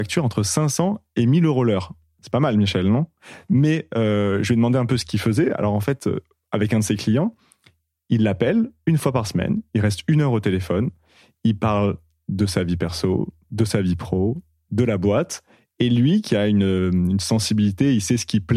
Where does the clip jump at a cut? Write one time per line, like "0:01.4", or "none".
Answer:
none